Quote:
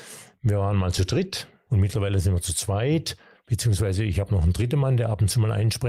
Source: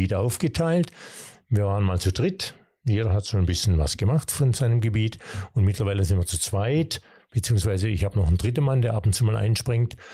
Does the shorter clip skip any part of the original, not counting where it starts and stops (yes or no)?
yes